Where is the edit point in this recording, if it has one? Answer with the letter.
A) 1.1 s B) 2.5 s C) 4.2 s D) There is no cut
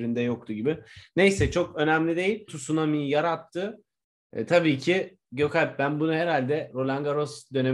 B